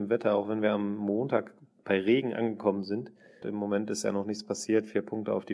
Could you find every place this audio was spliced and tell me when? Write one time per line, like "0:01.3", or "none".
0:03.4